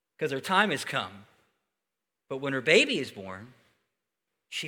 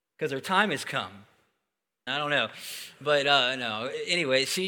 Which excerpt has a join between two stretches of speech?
second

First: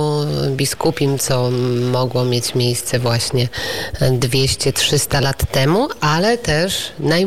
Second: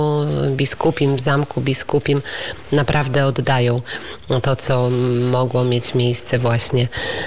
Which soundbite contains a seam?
first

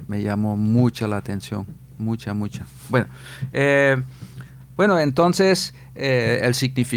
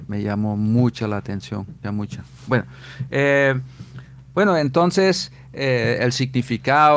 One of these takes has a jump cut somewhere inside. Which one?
second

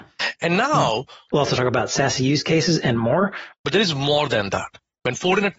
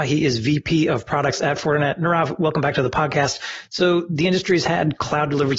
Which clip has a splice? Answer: first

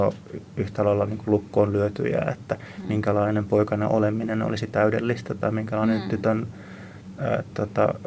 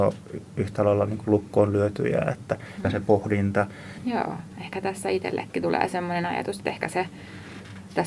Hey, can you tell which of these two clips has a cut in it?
second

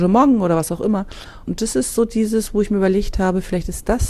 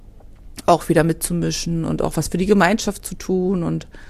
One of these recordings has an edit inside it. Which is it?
first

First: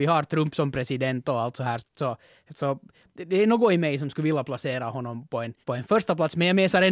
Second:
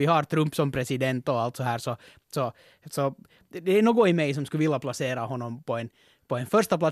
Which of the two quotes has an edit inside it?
first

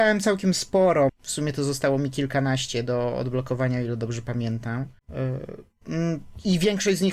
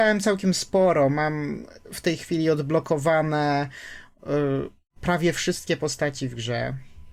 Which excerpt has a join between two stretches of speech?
first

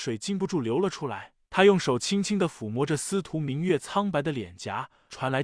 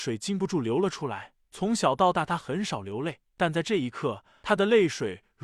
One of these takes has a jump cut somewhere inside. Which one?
first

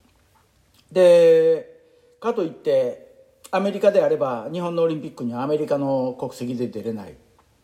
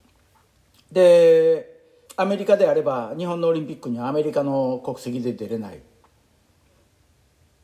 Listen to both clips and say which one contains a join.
second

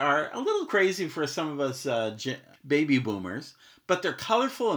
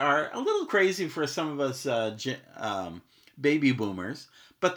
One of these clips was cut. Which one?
first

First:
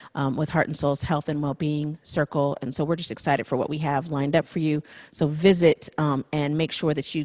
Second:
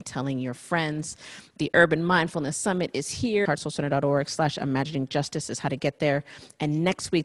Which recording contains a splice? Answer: second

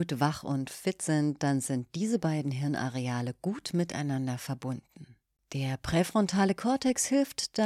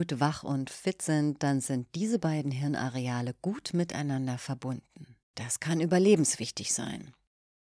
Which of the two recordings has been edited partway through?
second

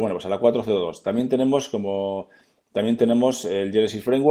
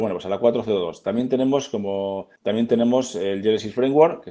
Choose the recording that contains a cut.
second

